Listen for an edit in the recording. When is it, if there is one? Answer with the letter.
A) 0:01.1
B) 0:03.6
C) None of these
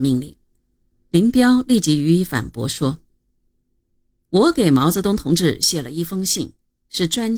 A